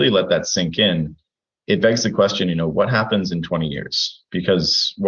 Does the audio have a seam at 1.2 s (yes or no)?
no